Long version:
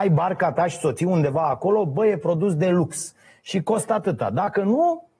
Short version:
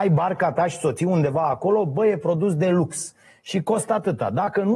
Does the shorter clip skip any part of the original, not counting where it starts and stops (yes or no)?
no